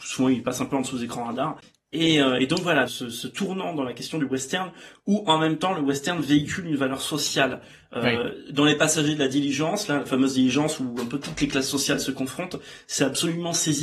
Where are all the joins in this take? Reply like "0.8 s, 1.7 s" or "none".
2.9 s